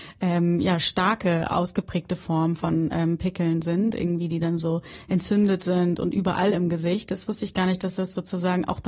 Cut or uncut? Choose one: uncut